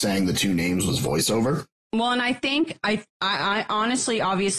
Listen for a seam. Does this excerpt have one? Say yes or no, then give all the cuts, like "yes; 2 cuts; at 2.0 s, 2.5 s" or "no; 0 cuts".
yes; 1 cut; at 1.8 s